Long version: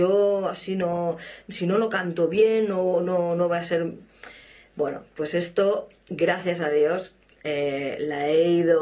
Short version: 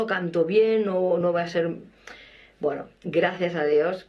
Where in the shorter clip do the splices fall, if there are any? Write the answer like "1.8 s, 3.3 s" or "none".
1.2 s, 3.0 s